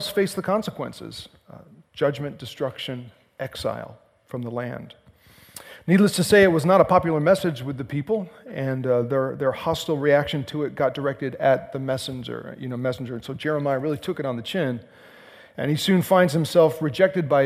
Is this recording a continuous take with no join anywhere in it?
yes; 0 cuts

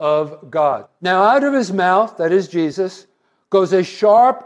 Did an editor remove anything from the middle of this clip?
yes; 1 cut; at 1.0 s

